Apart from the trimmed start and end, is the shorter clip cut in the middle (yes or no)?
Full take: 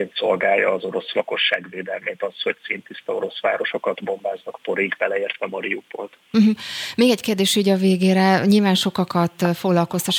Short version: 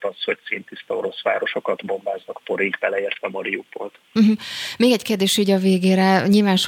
no